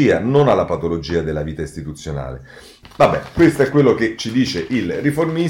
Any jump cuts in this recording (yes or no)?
yes